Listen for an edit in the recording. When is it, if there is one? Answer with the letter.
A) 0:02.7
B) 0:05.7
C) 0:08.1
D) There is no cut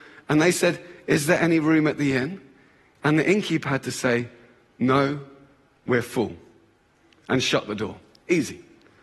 D